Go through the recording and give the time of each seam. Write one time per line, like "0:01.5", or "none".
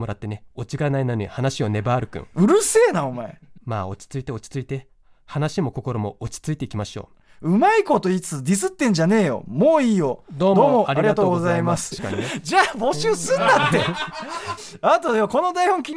0:11.9
0:14.6